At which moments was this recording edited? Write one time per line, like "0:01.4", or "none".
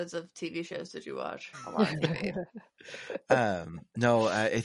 0:01.5